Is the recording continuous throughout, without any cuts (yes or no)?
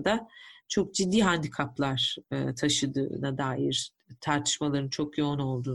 yes